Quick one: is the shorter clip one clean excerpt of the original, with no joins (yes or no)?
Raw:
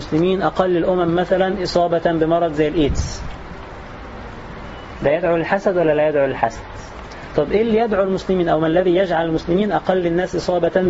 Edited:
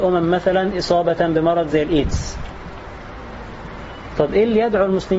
no